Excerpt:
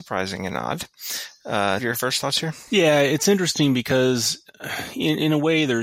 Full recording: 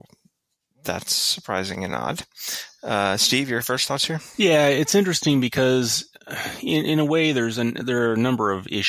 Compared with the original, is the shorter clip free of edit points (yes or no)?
no